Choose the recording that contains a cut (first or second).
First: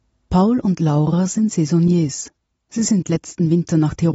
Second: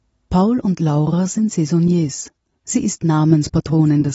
second